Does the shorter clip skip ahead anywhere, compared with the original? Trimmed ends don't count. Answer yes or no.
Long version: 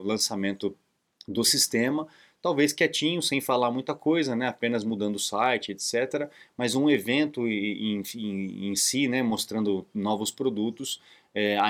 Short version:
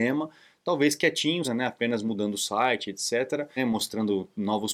yes